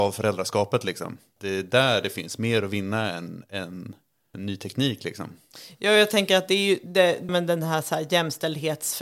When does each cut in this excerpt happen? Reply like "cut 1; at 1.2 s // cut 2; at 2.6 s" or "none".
cut 1; at 4.3 s // cut 2; at 7.3 s